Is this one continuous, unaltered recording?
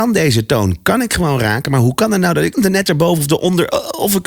no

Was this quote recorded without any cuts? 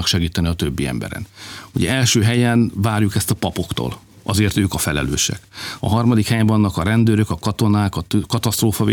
no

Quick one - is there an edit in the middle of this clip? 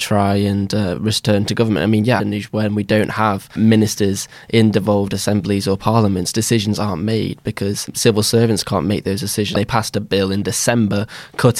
yes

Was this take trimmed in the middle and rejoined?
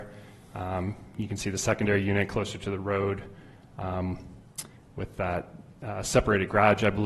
no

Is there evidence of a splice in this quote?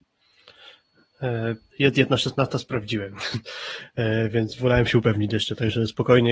yes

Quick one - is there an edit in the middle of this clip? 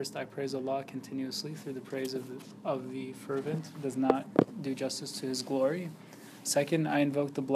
no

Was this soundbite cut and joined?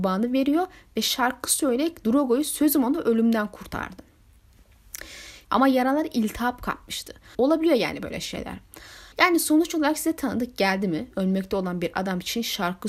yes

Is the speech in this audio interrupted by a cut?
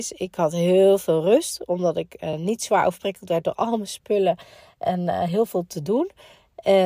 no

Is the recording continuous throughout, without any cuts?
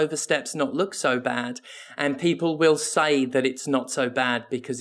yes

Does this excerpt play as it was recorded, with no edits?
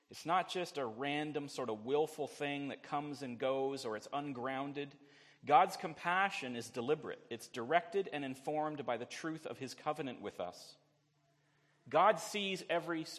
yes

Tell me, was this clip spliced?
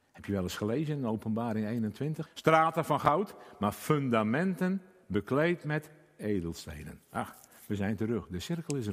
yes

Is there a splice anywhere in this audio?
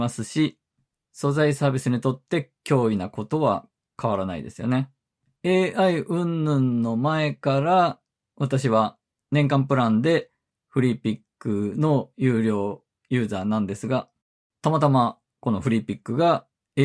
yes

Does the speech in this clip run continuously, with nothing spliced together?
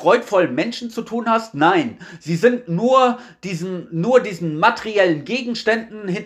yes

